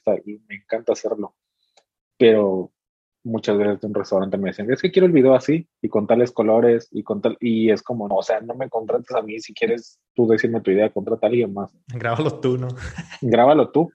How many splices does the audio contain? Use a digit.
1